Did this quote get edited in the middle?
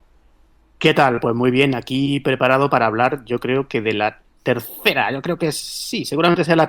no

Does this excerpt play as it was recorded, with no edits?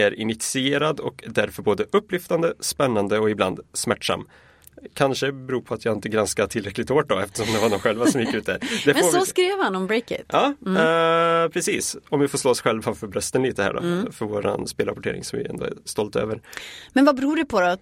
yes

